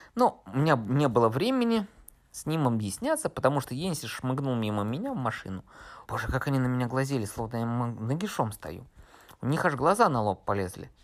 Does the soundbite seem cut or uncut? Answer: cut